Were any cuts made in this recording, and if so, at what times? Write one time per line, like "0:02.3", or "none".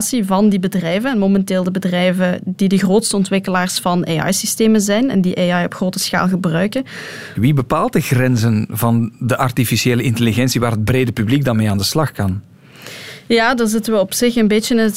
0:07.3